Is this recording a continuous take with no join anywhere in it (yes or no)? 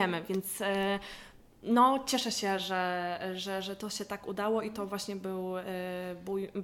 yes